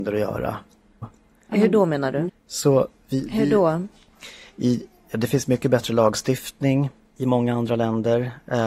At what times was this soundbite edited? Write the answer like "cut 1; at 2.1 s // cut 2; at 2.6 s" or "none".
cut 1; at 1.0 s // cut 2; at 2.3 s